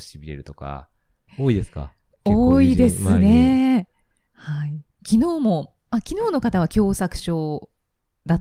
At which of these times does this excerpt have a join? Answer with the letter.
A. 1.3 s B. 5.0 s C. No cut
A